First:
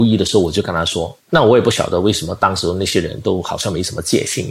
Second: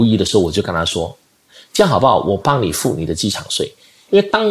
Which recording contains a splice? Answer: first; 1 cut; at 1.2 s

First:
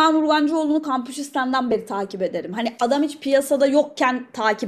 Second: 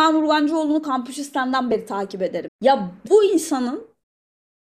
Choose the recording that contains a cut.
second; 1 cut; at 2.5 s

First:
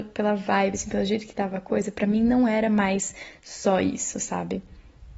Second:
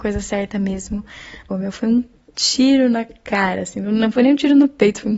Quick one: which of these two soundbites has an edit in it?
second; 1 cut; at 1.5 s

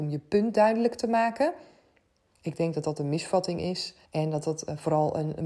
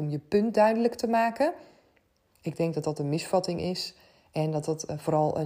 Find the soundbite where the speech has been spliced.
first; 1 cut; at 4.0 s

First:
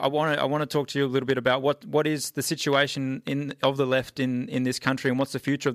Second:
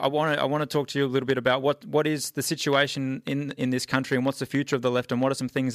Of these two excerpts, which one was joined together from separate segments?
second; 1 cut; at 3.6 s

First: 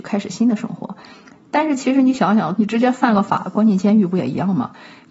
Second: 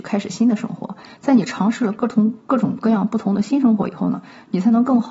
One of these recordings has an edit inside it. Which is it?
first; 2 cuts; at 1.1 s, 2.6 s

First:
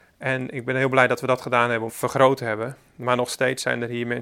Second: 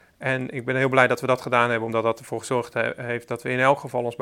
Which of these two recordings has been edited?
first; 1 cut; at 1.9 s

